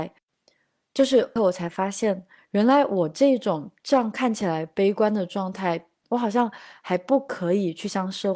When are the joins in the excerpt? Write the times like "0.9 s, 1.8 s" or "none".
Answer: 1.4 s, 6.0 s